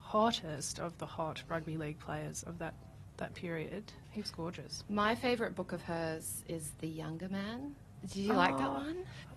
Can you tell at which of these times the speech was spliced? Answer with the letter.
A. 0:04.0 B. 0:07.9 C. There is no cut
C